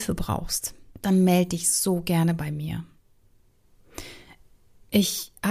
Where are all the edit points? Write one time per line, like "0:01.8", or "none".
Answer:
0:00.9